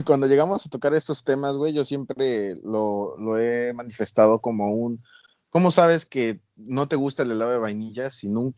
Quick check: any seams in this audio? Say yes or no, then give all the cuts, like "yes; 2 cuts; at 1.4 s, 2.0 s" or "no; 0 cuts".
no; 0 cuts